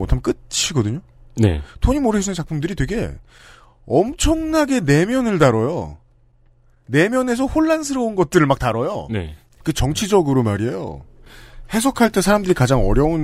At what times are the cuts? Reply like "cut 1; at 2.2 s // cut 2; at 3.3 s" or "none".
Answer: cut 1; at 9.6 s